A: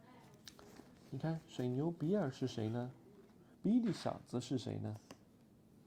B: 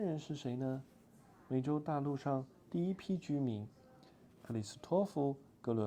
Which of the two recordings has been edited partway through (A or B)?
A